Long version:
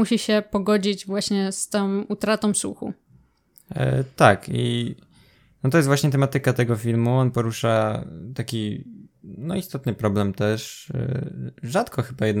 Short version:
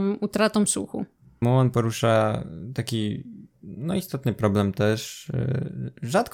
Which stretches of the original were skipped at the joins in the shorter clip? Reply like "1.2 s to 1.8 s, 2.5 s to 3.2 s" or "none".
3.3 s to 7.0 s